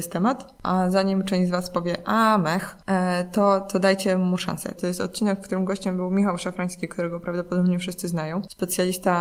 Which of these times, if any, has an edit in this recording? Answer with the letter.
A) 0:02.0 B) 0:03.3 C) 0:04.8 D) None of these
C